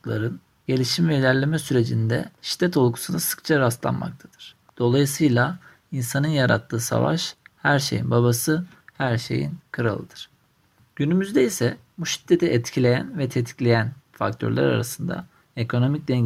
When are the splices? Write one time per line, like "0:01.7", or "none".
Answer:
0:04.7
0:10.8